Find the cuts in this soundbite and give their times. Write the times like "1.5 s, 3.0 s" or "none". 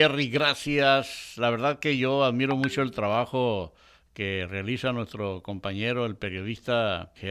none